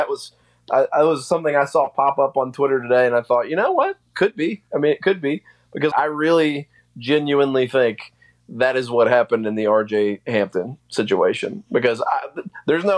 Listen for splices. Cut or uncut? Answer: cut